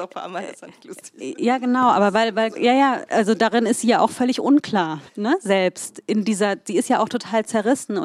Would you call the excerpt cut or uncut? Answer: cut